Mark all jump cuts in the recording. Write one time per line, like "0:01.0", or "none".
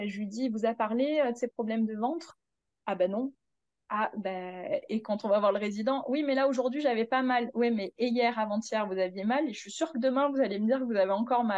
none